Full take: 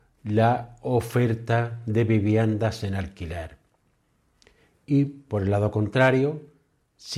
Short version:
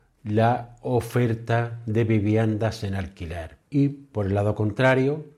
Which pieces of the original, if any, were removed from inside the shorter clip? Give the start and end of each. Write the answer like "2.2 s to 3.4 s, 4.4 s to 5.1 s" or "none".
3.6 s to 4.8 s

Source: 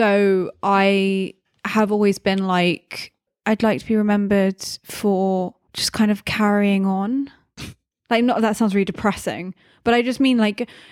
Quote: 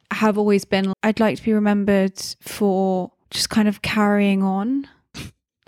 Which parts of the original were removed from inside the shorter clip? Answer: 2.5 s to 3.4 s

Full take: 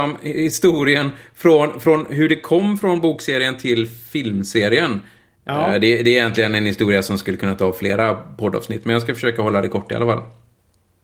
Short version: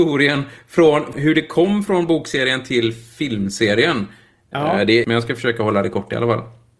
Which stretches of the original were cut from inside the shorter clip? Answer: 1.8 s to 2.1 s, 6.0 s to 8.8 s

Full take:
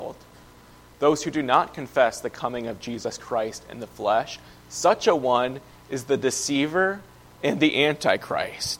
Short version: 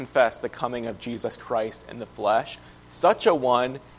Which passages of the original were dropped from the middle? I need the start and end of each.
none

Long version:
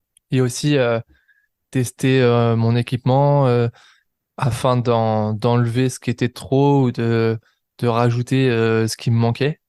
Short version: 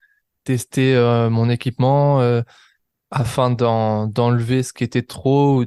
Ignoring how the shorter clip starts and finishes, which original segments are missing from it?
none

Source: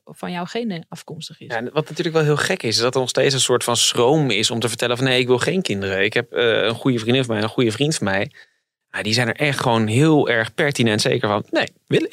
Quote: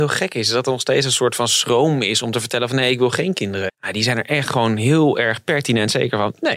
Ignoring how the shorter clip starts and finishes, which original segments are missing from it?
6.0 s to 8.8 s

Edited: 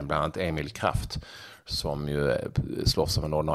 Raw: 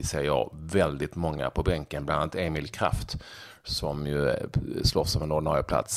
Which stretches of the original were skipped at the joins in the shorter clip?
none

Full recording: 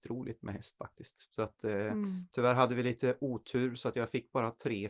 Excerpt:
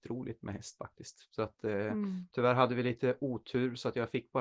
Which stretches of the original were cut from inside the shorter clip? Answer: none

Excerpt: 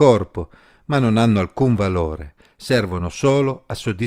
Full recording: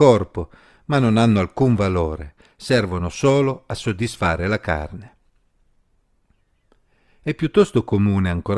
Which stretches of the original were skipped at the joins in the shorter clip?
none

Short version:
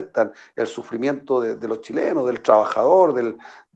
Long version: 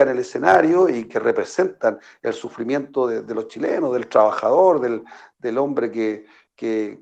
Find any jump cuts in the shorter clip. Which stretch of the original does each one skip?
none

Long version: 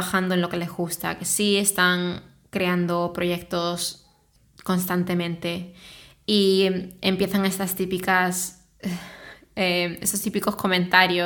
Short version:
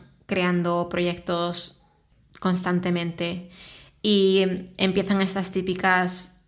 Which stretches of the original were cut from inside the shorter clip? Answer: none

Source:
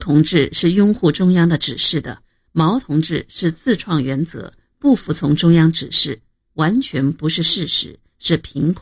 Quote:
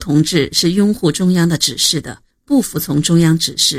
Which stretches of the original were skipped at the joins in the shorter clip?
2.3 s to 4.6 s

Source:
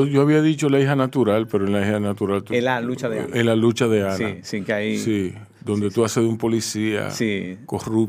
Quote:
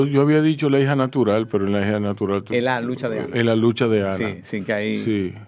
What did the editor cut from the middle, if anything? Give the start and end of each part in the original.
none

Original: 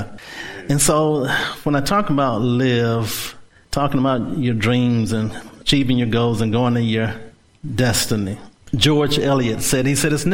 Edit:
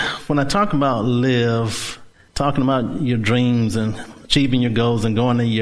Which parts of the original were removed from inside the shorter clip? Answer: none

